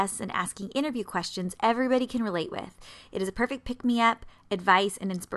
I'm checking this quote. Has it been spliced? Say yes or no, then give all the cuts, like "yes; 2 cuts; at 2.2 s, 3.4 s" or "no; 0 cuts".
no; 0 cuts